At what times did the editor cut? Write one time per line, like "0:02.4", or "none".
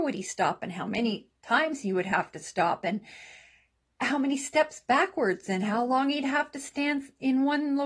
0:01.4